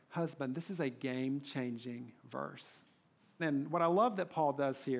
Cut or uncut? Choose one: cut